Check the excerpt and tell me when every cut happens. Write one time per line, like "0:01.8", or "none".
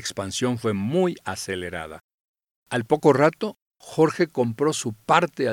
0:02.5